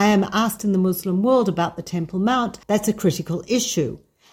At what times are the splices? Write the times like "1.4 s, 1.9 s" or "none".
2.6 s